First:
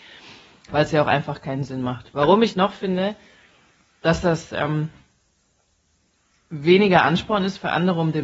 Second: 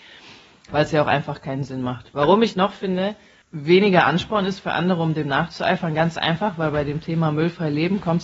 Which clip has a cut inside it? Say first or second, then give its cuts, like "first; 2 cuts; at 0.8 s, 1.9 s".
second; 1 cut; at 3.4 s